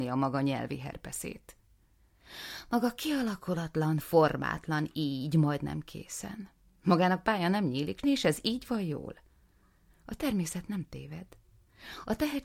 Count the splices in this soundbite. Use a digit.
1